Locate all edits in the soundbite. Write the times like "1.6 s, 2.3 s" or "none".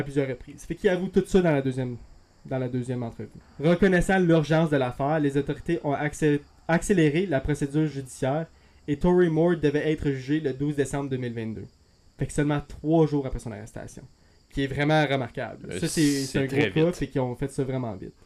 3.4 s